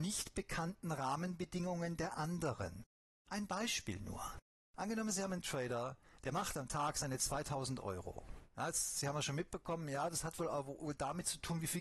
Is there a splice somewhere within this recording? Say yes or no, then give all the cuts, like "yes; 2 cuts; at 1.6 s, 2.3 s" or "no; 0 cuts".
no; 0 cuts